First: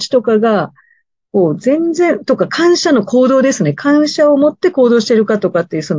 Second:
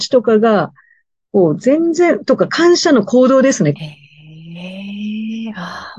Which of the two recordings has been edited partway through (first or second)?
second